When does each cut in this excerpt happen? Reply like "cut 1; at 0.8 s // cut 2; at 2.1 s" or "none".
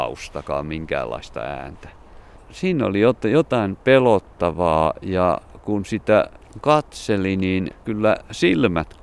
cut 1; at 2.4 s